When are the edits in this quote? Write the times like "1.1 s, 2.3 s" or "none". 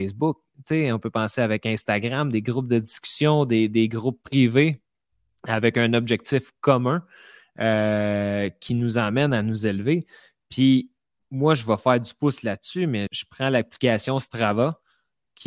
13.1 s